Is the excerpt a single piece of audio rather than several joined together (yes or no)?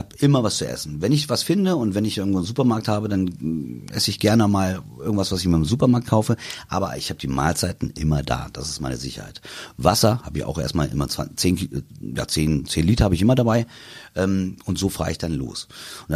yes